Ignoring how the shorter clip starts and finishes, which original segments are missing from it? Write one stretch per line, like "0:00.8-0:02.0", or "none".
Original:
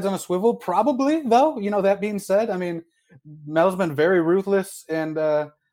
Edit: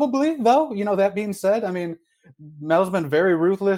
none